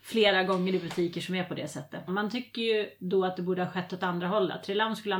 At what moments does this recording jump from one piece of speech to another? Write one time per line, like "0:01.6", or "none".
0:02.1

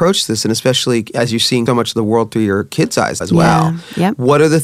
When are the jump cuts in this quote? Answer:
0:01.7
0:03.2

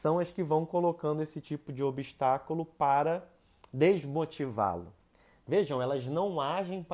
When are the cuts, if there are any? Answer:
none

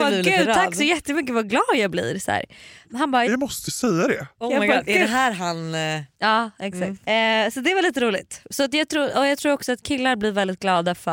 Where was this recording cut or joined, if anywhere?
none

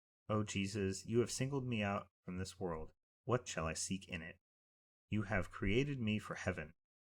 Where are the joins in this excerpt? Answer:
0:03.5

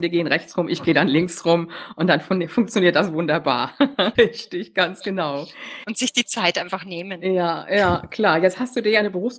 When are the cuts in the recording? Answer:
0:04.1

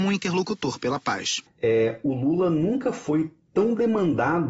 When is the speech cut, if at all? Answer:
0:01.5

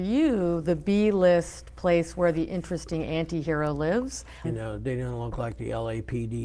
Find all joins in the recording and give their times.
0:04.4

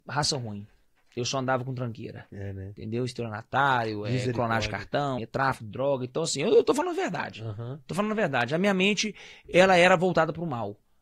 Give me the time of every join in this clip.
0:05.2

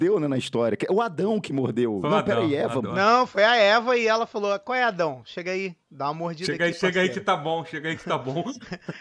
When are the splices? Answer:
none

